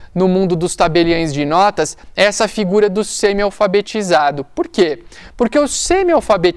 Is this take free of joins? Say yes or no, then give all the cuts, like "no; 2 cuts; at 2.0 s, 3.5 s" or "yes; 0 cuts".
yes; 0 cuts